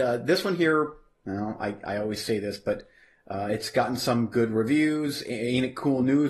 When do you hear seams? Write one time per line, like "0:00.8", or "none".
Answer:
none